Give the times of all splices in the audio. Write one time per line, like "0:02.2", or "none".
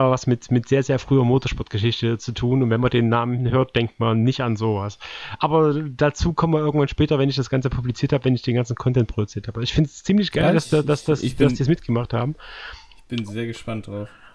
none